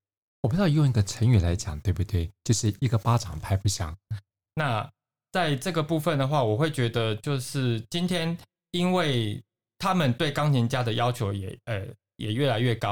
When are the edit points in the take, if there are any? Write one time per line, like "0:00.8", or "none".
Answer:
0:04.1